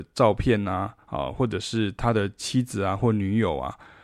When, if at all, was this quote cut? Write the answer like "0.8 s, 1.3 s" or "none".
none